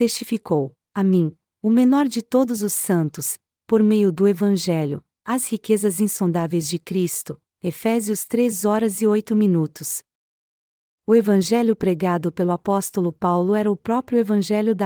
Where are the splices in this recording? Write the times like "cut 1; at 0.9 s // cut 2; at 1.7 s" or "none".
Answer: cut 1; at 3.5 s

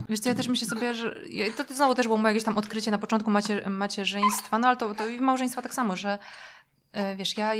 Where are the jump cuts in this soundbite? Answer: none

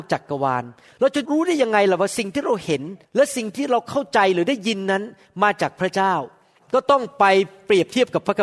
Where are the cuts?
cut 1; at 1.3 s // cut 2; at 3.0 s

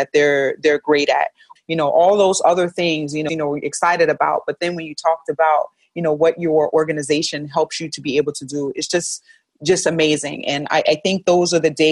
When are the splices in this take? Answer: cut 1; at 1.6 s // cut 2; at 3.3 s

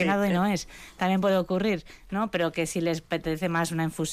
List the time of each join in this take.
none

